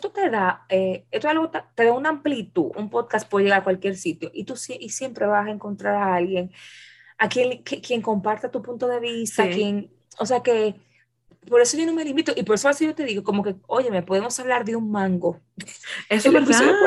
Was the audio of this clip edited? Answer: yes; 1 cut; at 2.7 s

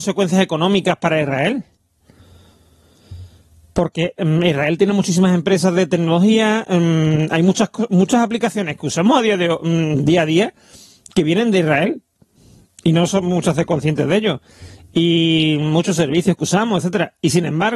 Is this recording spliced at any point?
no; 0 cuts

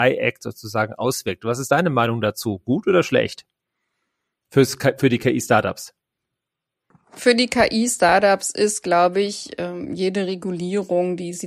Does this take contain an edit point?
no; 0 cuts

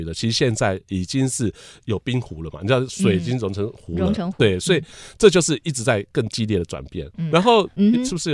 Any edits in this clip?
yes; 1 cut; at 7.3 s

